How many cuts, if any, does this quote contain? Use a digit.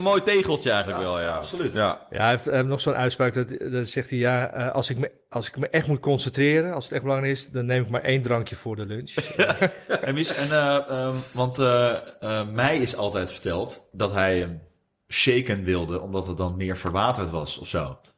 1